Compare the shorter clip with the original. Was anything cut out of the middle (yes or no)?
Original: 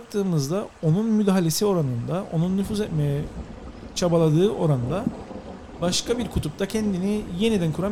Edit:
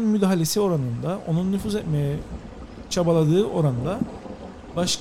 no